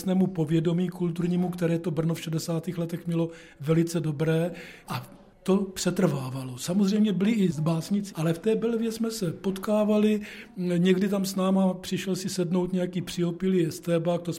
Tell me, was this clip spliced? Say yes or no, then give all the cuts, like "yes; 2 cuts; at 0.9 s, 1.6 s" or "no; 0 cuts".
yes; 1 cut; at 8.1 s